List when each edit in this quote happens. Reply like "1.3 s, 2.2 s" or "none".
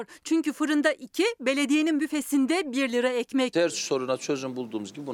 3.5 s